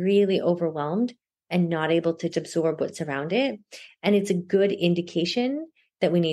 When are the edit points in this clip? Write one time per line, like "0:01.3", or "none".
0:02.3